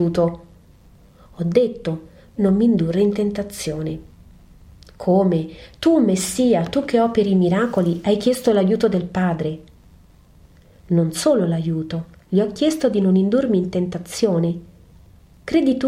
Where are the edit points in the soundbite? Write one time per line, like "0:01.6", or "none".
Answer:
0:02.4